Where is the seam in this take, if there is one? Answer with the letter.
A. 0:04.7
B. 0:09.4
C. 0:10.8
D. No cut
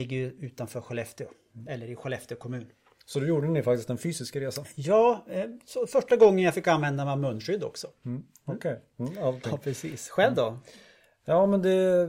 B